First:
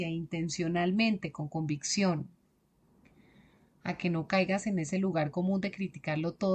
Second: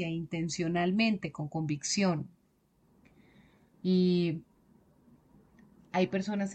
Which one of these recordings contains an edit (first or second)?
second